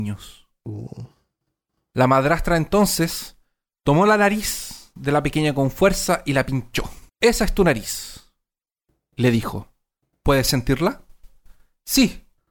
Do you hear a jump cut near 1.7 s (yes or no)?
no